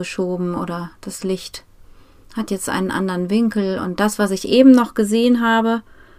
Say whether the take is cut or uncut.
uncut